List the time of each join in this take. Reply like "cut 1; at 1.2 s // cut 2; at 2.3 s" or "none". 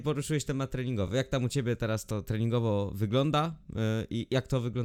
none